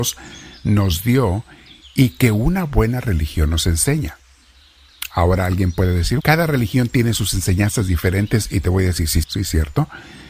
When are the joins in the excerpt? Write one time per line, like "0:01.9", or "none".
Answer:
0:06.2
0:09.2

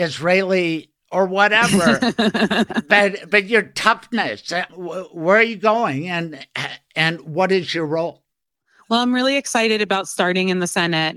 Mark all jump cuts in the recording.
0:04.7

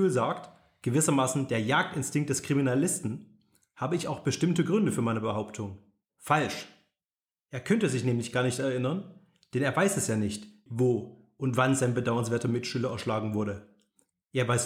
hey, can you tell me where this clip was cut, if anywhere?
0:06.0
0:10.7

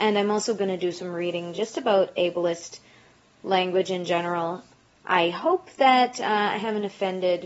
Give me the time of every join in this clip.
none

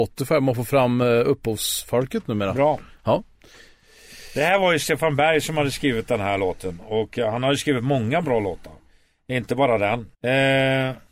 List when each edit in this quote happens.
0:10.1

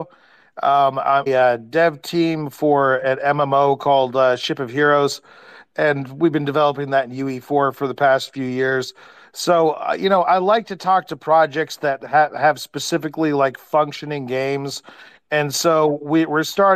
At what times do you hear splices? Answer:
0:01.3

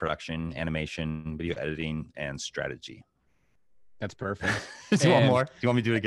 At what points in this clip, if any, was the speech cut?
none

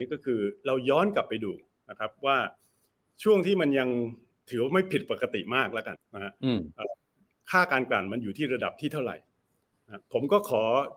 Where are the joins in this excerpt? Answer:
0:06.0

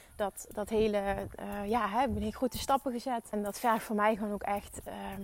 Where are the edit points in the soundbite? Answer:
0:03.3

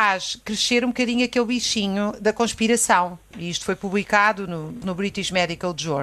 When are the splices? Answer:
0:03.3
0:04.8

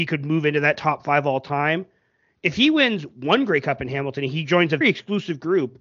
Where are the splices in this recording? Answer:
0:04.8

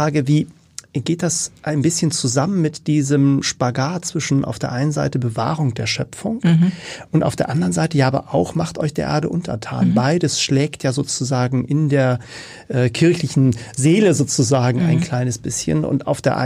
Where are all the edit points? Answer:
none

